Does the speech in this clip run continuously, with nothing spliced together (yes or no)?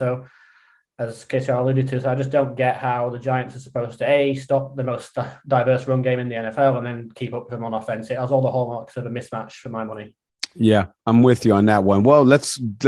yes